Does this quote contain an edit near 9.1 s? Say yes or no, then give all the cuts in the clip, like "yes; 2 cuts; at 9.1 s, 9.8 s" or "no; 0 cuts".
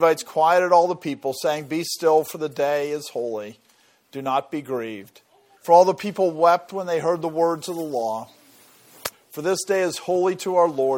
yes; 2 cuts; at 5.5 s, 9.1 s